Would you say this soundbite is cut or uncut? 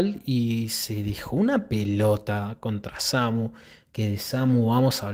uncut